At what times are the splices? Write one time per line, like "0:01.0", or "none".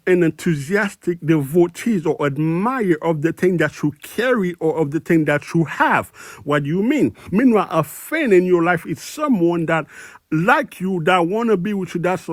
0:07.3

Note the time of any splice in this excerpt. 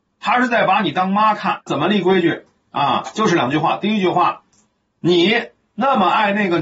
0:01.7
0:04.8

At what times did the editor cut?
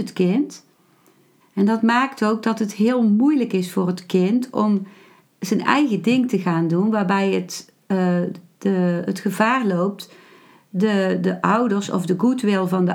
0:01.4

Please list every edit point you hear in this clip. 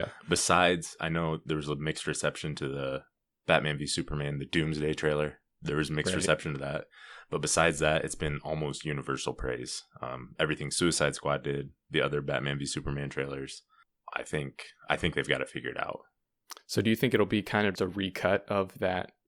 0:17.7

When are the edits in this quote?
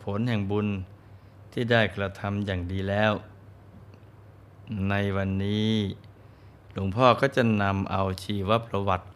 none

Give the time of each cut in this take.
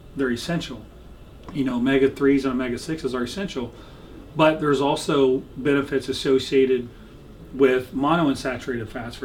none

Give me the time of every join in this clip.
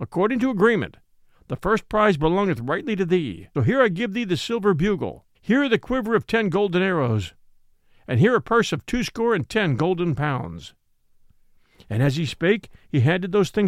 0:03.5
0:05.3

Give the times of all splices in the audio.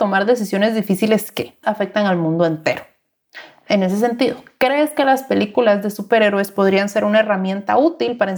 0:01.6

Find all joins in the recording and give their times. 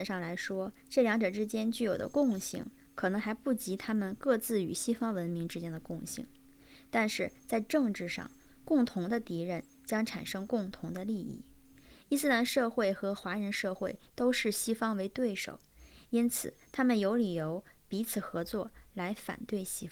none

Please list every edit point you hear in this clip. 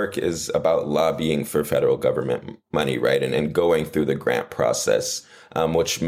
none

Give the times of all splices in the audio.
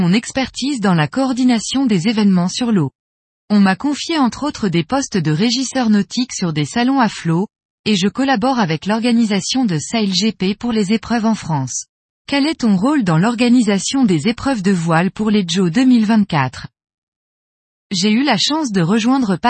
0:12.2

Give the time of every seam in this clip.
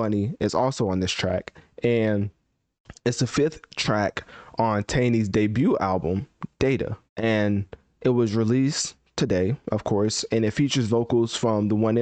0:07.1

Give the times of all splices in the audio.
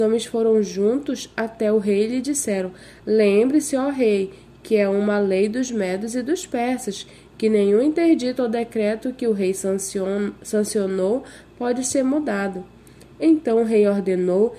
none

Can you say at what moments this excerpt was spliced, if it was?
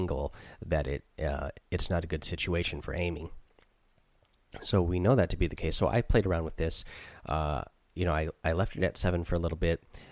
0:01.6

